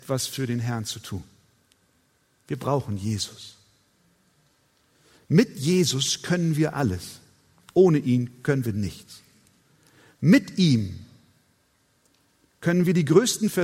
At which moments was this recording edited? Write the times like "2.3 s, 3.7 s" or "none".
none